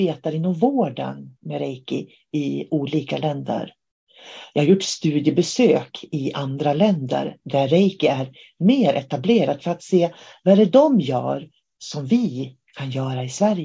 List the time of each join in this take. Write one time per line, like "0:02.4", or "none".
none